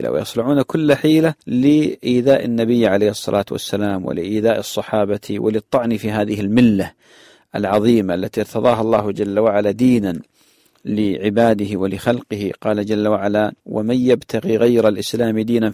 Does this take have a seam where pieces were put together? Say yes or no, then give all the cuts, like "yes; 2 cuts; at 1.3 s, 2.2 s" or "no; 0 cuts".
yes; 2 cuts; at 1.4 s, 13.6 s